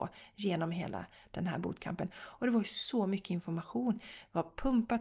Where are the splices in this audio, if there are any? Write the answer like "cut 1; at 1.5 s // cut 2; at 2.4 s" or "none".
none